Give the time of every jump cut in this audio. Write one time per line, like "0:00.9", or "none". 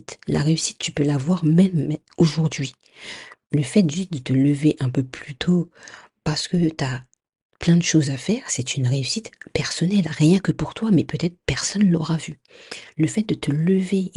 none